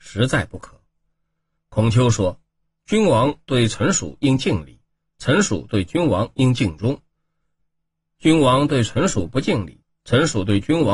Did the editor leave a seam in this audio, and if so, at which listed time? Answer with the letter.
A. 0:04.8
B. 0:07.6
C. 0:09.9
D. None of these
D